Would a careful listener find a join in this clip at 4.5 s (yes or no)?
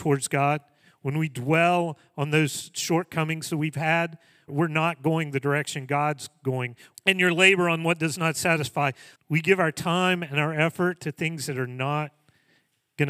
yes